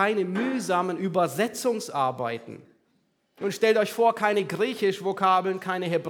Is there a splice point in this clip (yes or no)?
no